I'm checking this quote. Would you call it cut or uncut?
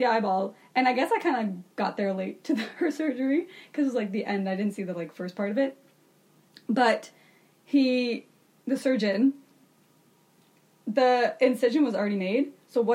uncut